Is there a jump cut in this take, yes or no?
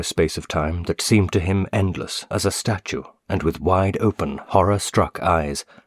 yes